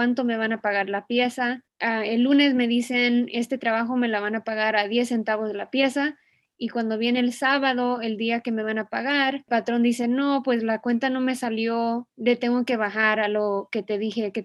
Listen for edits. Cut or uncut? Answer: uncut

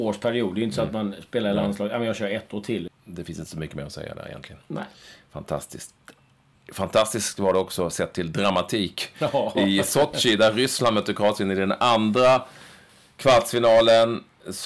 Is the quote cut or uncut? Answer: cut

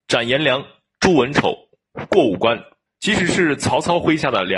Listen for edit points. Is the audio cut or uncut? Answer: cut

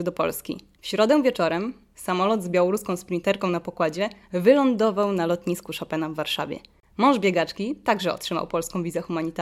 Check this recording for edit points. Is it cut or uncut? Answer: uncut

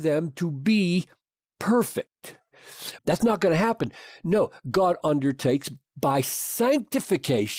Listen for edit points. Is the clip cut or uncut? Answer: cut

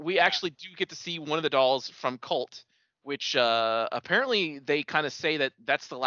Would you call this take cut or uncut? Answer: uncut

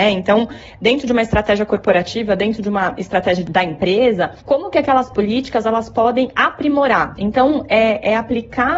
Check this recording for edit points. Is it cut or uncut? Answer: uncut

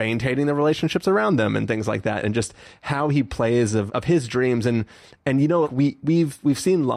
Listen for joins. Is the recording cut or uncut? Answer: cut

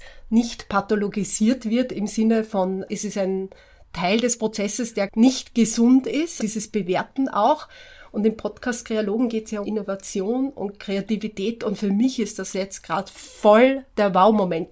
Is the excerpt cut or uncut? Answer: cut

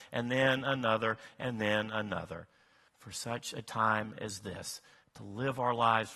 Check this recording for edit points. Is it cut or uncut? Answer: cut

